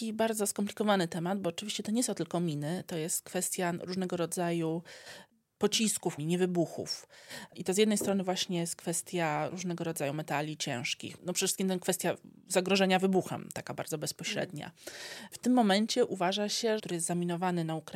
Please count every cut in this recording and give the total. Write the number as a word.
two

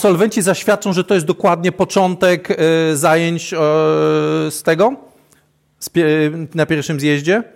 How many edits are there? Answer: zero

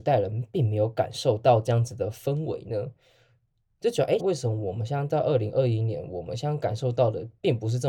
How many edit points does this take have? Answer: one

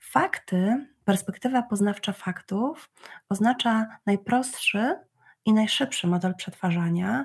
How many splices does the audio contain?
zero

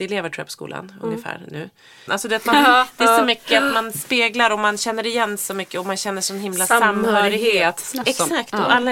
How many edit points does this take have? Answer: two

